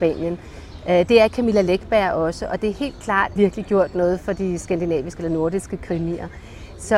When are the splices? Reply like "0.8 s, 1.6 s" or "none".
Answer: 3.4 s